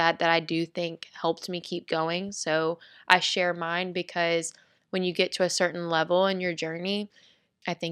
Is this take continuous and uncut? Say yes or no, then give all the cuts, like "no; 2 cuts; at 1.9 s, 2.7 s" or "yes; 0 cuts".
yes; 0 cuts